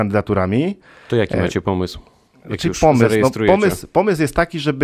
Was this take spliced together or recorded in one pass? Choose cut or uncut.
uncut